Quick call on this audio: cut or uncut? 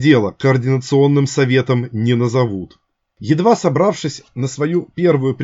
cut